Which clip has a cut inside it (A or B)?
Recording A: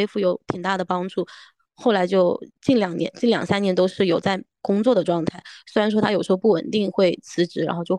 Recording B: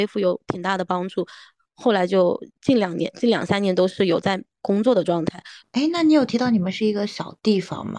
B